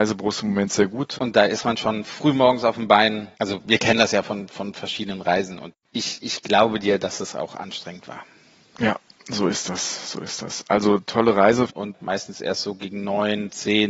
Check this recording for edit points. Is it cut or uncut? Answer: cut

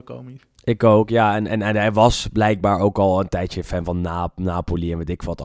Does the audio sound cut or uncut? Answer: uncut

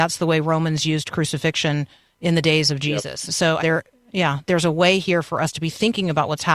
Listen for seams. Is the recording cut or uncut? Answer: cut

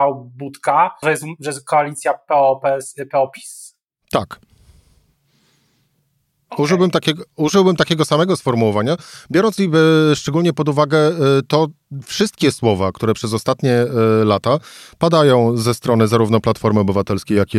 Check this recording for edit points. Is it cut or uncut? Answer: cut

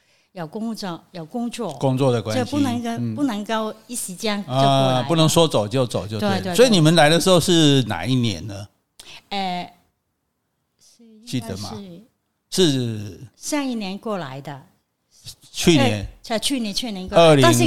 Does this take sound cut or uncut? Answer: uncut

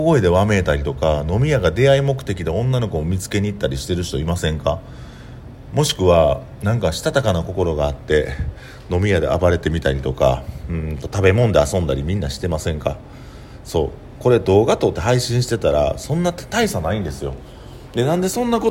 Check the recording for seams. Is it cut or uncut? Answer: cut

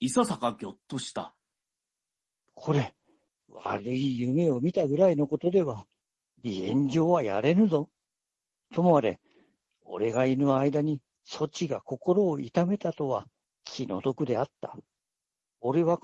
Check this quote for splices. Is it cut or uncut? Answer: cut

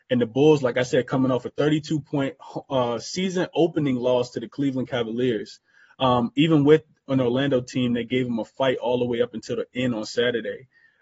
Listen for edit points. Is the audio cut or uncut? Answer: cut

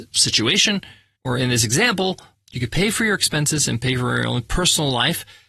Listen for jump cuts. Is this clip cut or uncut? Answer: uncut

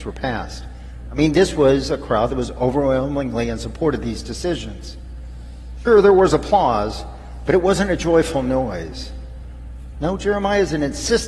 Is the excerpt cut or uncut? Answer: cut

